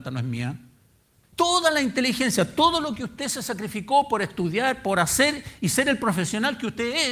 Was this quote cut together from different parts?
yes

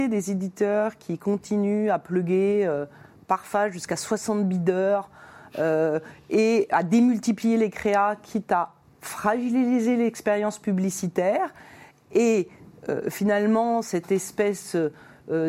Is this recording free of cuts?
yes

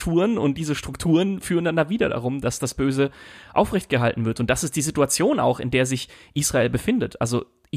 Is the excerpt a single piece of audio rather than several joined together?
yes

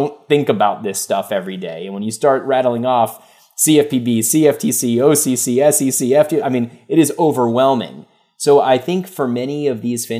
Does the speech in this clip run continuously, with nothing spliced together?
yes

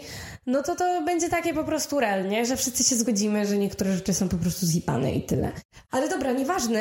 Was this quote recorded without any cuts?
no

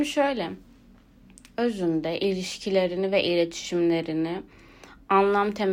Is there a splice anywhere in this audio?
no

